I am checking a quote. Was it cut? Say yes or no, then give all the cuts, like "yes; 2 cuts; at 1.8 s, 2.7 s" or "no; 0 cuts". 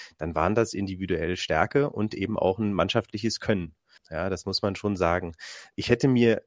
yes; 1 cut; at 4.0 s